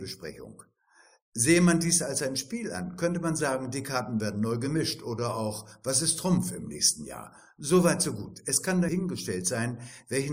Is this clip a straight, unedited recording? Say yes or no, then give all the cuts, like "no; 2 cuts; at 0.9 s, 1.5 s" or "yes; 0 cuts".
yes; 0 cuts